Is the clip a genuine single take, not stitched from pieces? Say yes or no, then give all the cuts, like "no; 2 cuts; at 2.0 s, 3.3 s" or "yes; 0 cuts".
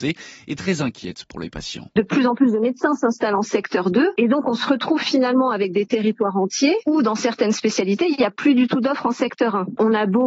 yes; 0 cuts